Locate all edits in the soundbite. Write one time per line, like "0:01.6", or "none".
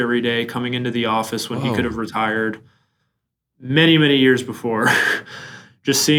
none